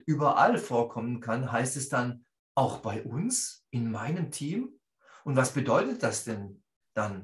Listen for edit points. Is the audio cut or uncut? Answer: uncut